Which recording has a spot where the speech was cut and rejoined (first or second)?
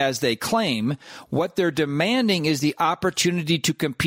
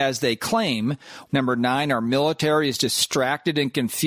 second